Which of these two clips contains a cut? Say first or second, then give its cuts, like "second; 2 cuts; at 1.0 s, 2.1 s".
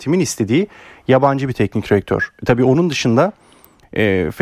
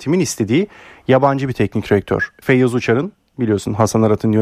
second; 1 cut; at 2.4 s